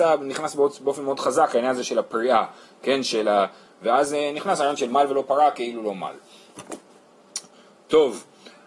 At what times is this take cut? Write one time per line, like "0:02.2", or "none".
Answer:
0:03.7